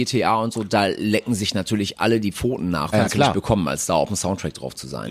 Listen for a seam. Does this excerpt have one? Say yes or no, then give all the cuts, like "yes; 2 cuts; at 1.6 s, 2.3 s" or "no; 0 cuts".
yes; 1 cut; at 2.9 s